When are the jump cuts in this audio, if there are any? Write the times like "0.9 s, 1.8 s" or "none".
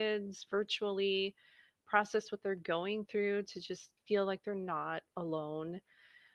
4.0 s